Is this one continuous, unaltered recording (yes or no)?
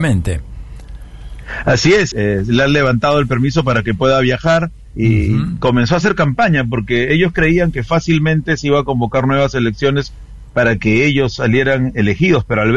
no